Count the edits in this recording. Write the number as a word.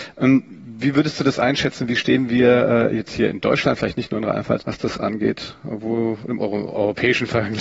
one